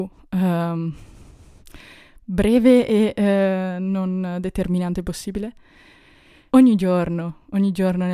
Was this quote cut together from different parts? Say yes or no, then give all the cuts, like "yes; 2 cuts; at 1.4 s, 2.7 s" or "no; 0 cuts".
yes; 1 cut; at 6.5 s